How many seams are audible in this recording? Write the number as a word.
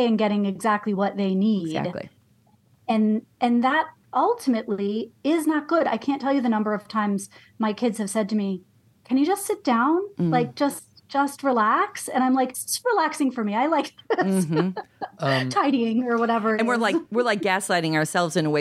one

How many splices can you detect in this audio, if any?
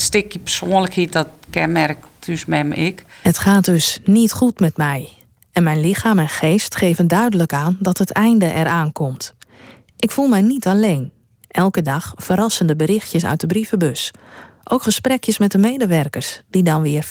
one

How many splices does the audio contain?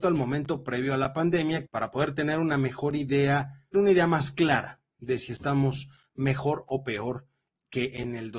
two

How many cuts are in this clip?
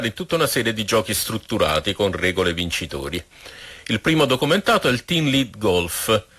zero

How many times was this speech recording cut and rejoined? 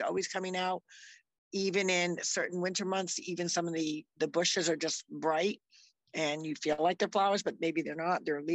zero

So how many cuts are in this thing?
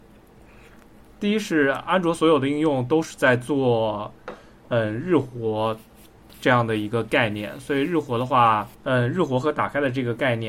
one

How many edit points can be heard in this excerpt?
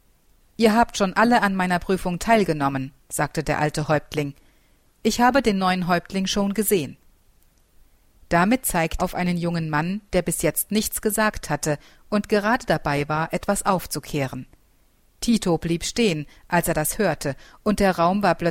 one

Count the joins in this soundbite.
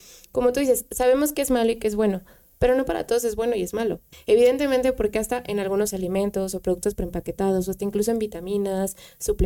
one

